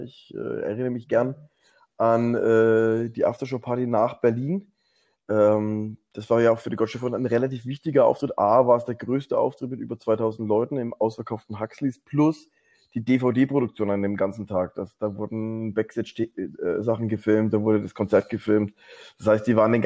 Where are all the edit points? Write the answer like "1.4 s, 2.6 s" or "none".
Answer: none